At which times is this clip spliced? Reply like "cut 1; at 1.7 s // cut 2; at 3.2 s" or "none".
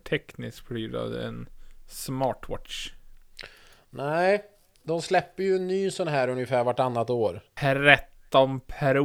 cut 1; at 4.8 s // cut 2; at 7.6 s